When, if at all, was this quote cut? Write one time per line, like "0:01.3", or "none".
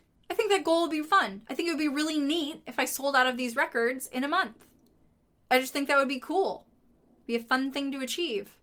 0:01.0

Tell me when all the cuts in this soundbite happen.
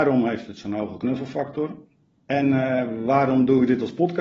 0:02.1

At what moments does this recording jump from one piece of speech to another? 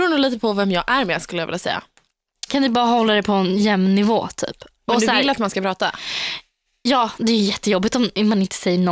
0:02.5

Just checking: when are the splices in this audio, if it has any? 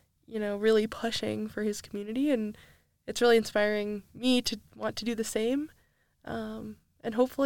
none

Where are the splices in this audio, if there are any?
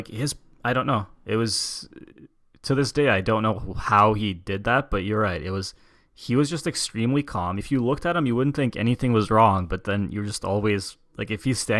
none

